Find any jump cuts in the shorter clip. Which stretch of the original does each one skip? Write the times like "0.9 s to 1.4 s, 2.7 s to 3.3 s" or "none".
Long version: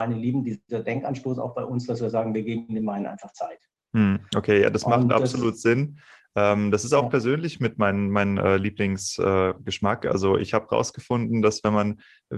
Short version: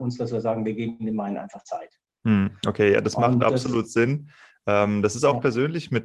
none